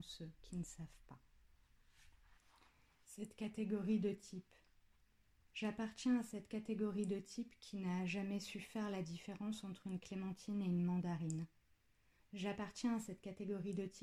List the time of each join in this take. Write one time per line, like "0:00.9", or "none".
0:12.2

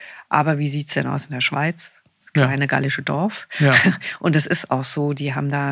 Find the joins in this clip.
none

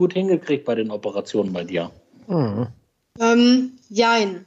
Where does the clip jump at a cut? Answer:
none

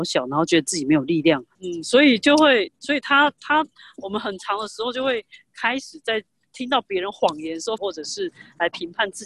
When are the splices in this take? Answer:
0:01.5
0:07.8

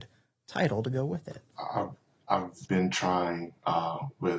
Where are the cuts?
0:01.5
0:02.7

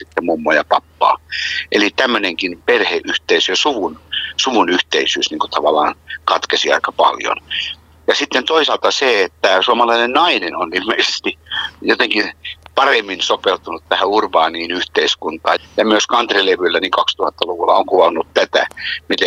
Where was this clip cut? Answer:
0:15.6

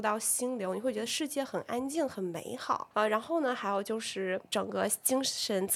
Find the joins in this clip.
none

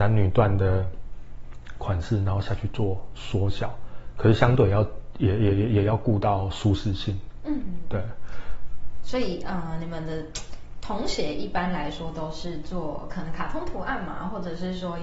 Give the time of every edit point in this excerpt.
none

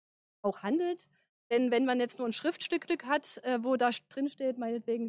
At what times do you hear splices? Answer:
none

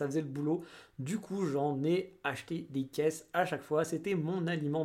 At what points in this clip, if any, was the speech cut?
none

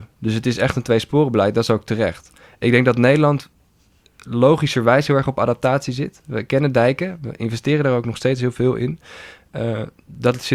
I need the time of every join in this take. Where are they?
none

